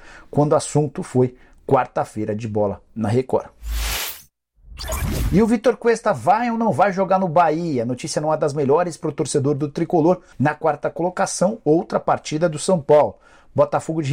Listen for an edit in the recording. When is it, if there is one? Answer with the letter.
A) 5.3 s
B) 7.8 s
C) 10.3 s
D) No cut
C